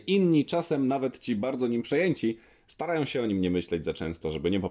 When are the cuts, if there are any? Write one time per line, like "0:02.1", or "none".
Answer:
none